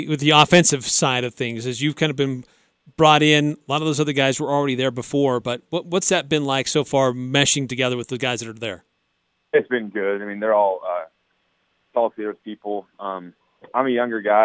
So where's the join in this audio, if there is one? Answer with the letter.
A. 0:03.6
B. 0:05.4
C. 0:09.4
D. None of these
D